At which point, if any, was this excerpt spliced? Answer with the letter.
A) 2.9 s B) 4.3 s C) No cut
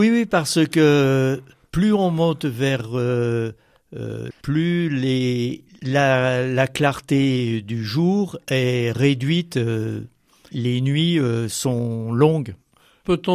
B